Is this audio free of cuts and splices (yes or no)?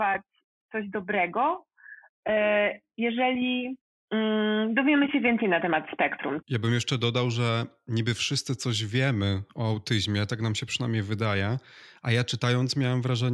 no